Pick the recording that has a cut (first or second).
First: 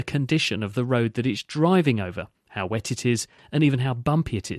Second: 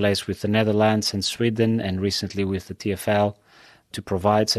first